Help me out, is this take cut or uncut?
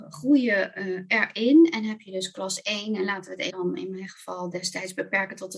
cut